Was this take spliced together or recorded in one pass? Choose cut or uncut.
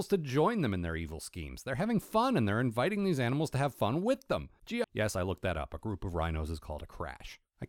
cut